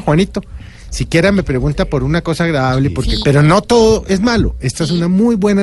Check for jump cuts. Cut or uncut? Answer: cut